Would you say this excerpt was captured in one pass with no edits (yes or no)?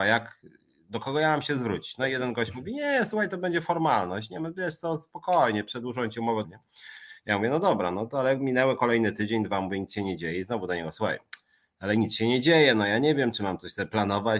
no